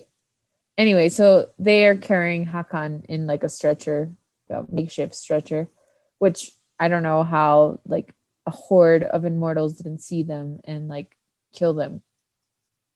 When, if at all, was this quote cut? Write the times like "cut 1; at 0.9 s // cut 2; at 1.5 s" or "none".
cut 1; at 4.5 s